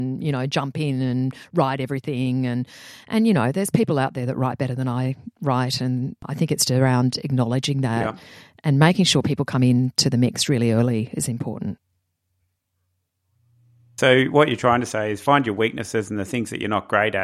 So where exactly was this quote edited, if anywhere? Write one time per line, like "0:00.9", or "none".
0:06.7

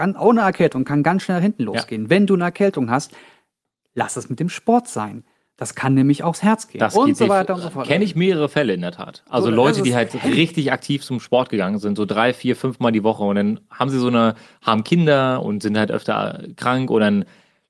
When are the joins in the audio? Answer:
none

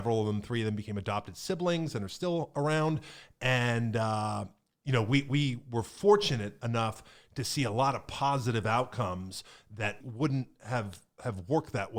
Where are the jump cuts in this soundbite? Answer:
0:10.0

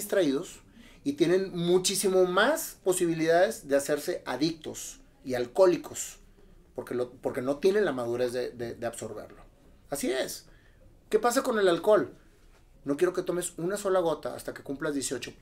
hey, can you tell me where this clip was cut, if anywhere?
0:09.8
0:12.7

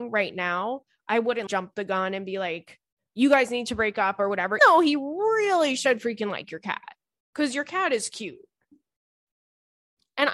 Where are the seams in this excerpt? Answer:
0:01.5
0:04.6

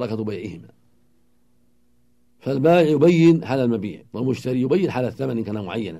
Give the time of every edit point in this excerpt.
0:04.1

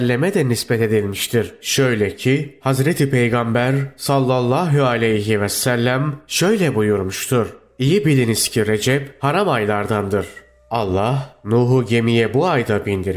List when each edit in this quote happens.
none

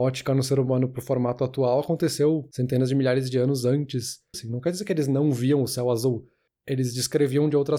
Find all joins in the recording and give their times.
0:04.3

